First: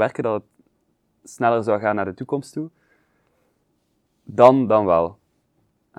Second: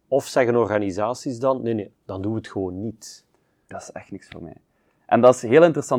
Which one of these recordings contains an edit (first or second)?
second